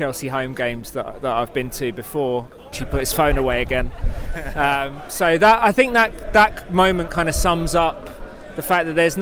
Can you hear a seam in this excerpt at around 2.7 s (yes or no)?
yes